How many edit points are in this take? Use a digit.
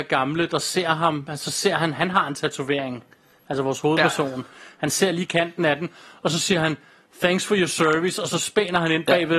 0